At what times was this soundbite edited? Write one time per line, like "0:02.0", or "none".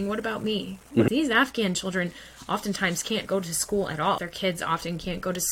0:01.1
0:04.2